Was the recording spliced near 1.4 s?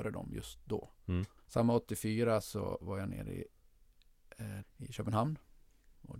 yes; 2 cuts; at 1.4 s, 4.6 s

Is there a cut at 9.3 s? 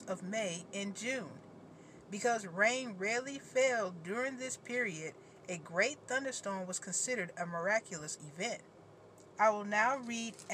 yes; 1 cut; at 9.3 s

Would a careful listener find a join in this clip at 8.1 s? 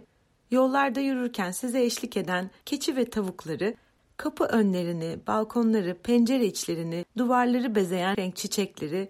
yes; 1 cut; at 8.1 s

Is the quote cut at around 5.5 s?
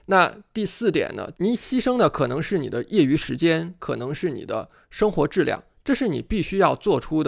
no; 2 cuts; at 1.3 s, 3.8 s

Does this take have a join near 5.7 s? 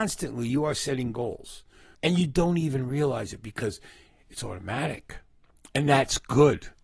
no; 1 cut; at 1.9 s

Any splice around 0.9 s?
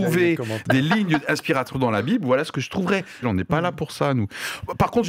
no; 1 cut; at 3.2 s

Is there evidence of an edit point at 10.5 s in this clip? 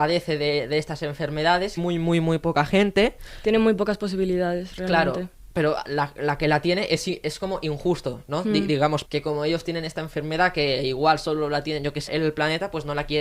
no; 3 cuts; at 1.8 s, 9.0 s, 12.1 s

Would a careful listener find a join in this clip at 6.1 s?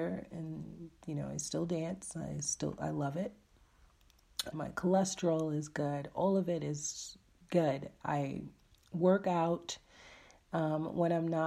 no; 1 cut; at 4.5 s

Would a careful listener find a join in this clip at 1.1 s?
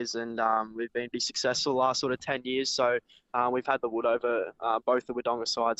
yes; 1 cut; at 1.1 s

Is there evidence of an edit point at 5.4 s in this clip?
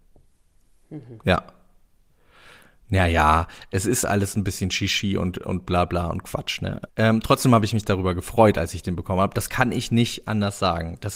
no; 1 cut; at 6.9 s

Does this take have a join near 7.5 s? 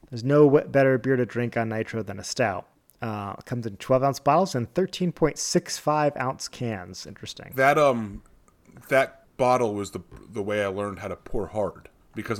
no; 0 cuts

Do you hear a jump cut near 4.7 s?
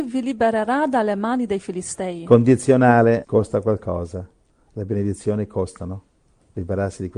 no; 1 cut; at 3.2 s

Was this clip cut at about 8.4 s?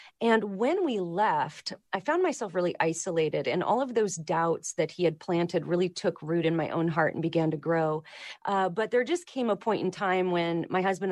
yes; 1 cut; at 8.4 s

